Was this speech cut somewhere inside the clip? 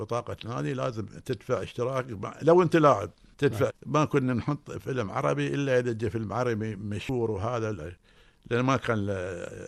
yes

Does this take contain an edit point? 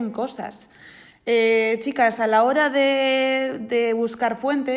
no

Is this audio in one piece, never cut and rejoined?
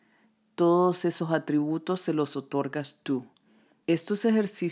no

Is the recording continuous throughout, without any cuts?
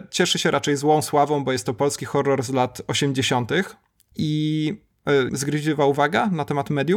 no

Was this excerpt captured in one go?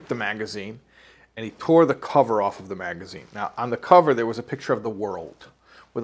yes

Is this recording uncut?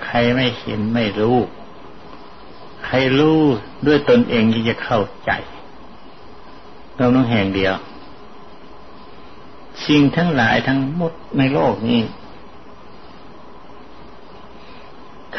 yes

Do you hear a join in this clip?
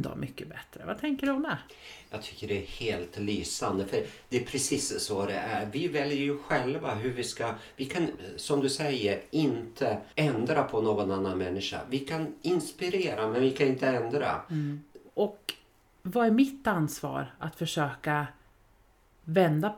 yes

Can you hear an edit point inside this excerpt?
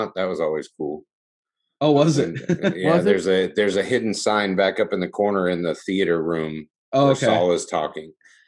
no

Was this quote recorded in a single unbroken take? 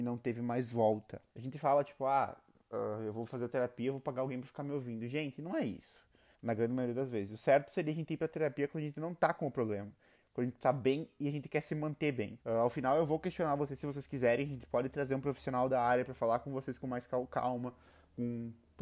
no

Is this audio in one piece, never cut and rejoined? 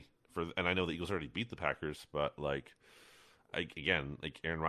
yes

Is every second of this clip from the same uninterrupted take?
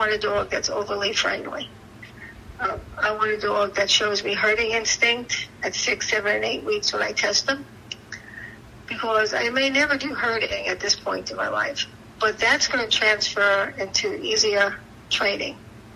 yes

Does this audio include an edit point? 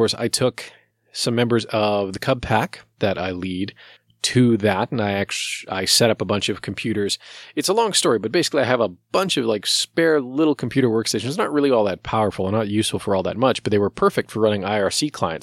no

